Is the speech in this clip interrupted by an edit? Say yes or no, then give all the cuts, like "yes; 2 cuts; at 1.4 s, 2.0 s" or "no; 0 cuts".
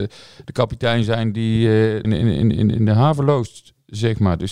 yes; 1 cut; at 2.0 s